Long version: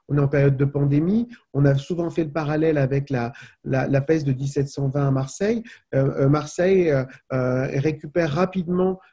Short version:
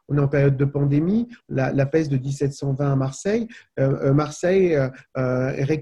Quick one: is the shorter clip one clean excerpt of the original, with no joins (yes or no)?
no